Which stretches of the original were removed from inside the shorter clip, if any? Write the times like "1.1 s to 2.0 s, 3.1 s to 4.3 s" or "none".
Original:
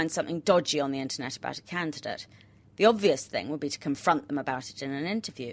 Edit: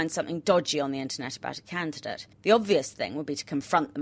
2.3 s to 2.7 s